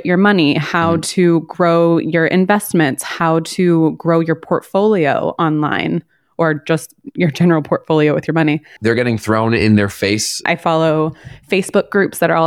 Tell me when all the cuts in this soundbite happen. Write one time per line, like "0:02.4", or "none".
0:08.8
0:10.5